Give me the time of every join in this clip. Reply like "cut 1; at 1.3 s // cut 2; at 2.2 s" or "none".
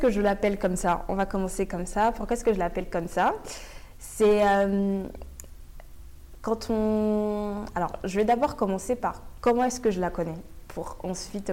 none